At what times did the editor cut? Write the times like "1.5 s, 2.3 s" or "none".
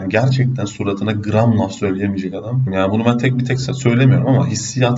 2.7 s